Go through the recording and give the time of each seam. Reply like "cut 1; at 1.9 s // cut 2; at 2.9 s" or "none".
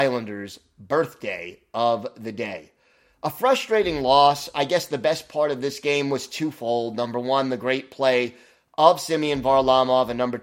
none